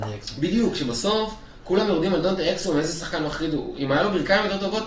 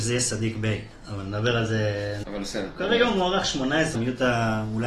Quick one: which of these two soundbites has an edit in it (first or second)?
second